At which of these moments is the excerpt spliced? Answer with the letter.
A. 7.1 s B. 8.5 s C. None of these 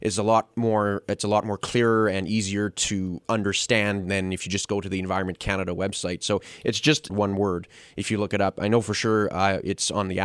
A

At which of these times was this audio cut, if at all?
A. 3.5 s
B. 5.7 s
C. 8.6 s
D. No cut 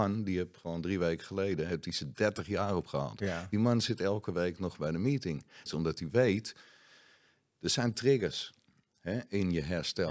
B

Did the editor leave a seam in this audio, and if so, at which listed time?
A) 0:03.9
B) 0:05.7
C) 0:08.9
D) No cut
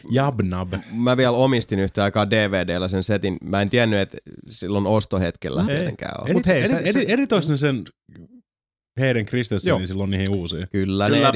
B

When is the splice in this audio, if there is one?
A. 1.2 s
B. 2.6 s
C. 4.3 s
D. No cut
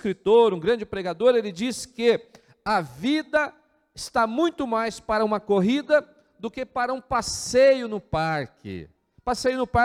D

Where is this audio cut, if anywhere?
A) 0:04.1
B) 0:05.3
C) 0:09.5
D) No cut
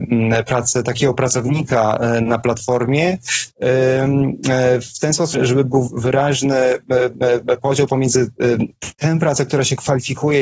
B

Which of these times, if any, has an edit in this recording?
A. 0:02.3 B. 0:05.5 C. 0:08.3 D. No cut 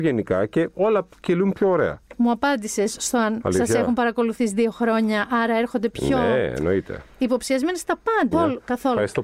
C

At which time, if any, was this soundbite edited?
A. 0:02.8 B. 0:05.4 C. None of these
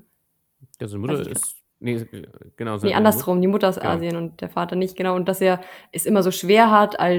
C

